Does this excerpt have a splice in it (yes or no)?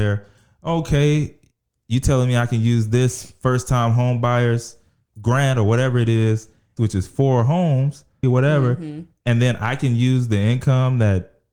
yes